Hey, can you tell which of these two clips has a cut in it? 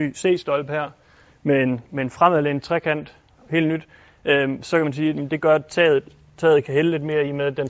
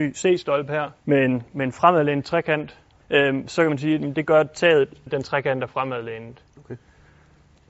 second; 3 cuts; at 1.0 s, 3.0 s, 5.1 s

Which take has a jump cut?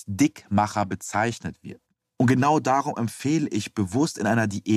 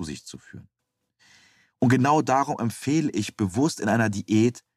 first; 1 cut; at 2.1 s

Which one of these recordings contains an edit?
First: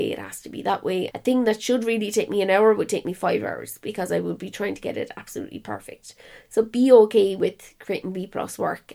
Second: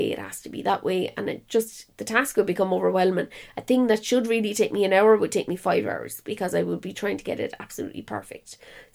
first; 1 cut; at 1.1 s

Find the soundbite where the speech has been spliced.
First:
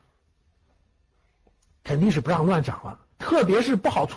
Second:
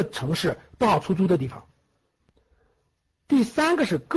first; 1 cut; at 3.1 s

